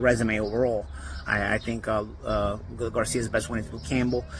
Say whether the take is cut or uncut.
cut